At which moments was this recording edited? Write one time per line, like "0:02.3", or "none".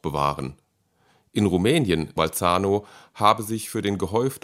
0:02.2